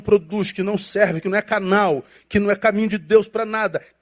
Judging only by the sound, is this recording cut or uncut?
uncut